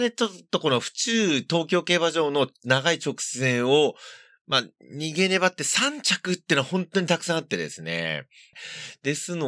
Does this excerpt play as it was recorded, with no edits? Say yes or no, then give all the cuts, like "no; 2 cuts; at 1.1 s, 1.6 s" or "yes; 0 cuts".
yes; 0 cuts